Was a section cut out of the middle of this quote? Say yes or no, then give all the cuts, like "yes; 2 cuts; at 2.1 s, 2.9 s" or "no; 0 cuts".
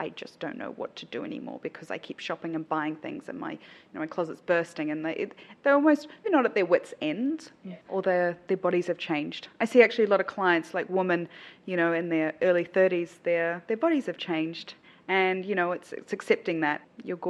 yes; 2 cuts; at 6.2 s, 7.8 s